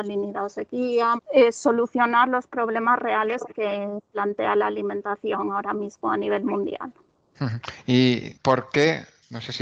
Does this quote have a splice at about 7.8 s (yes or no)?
no